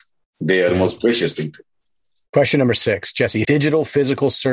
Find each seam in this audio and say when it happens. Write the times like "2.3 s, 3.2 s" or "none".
3.4 s